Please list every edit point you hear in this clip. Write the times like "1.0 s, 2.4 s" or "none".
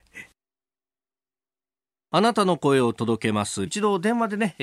3.7 s